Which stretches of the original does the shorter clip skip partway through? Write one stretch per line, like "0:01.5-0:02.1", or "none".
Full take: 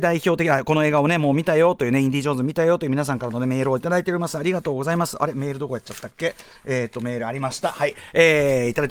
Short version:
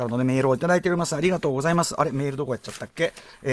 none

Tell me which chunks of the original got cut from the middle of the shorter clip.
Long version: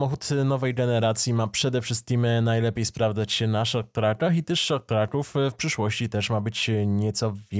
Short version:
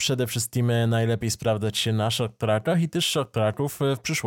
none

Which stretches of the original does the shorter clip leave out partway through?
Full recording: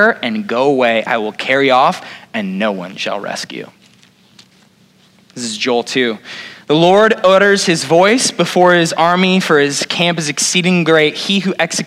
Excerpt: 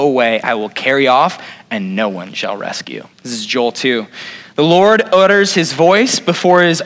0:03.8-0:05.2

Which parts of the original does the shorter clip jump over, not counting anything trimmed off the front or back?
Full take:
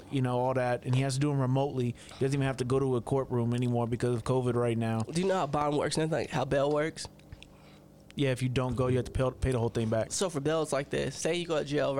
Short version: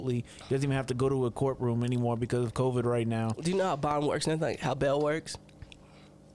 none

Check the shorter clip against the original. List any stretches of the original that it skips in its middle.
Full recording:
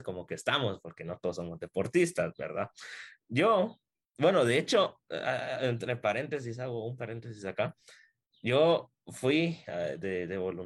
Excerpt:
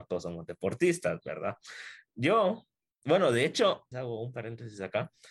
0:05.0-0:06.6

